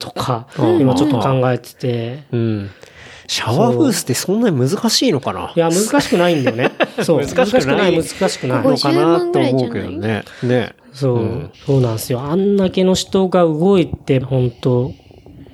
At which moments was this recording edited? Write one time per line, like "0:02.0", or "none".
0:11.5
0:14.2